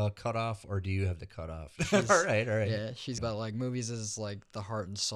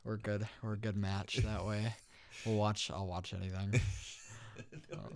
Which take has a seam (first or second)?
first